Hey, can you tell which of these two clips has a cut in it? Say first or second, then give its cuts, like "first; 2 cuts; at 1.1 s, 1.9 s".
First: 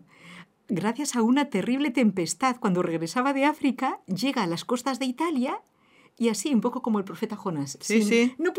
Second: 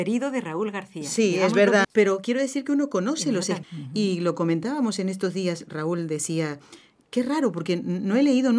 second; 2 cuts; at 1.8 s, 3.6 s